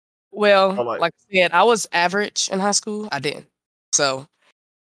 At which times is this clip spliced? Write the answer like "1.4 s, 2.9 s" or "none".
3.1 s